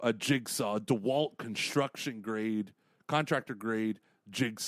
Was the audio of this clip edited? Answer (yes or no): no